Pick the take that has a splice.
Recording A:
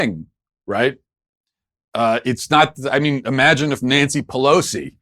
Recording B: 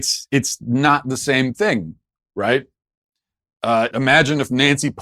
B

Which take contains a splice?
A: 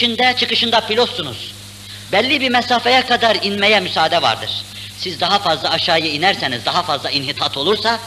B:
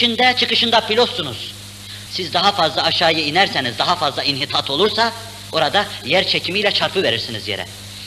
B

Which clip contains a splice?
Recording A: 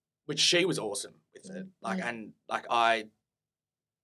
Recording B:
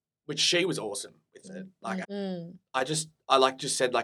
B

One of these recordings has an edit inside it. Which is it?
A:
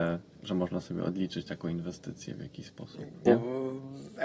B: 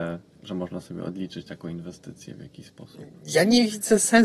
A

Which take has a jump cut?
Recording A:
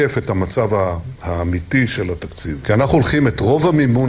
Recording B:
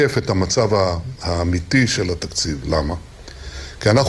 A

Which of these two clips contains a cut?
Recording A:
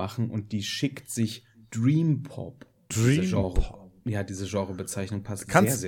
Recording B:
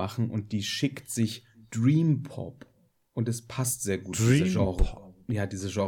A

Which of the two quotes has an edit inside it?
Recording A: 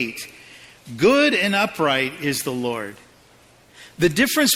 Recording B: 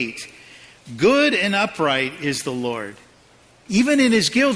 B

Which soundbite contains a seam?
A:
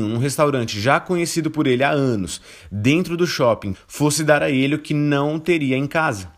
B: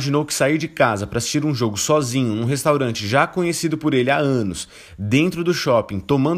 A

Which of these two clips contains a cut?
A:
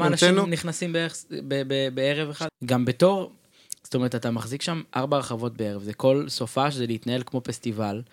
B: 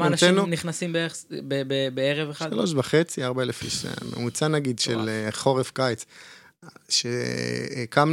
A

